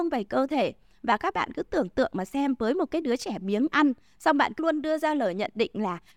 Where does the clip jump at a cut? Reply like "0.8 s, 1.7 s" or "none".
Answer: 4.6 s